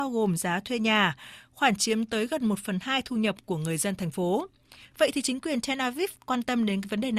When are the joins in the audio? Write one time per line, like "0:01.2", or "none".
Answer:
0:04.9